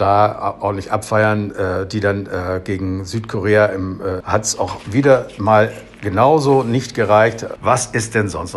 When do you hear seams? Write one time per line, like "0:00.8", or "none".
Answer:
0:04.2
0:07.6